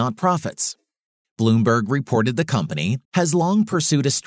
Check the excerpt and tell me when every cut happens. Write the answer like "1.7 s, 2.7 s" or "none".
1.2 s, 3.0 s